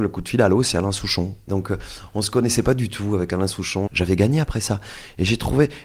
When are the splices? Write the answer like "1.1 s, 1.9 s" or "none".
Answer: 1.5 s, 3.9 s